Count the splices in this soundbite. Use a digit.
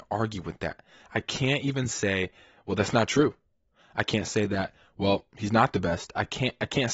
0